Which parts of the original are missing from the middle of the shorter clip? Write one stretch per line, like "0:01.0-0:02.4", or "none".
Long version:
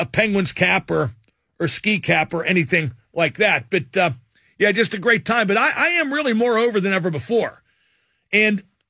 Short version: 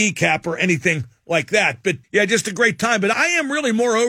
0:03.9-0:04.5
0:05.6-0:05.7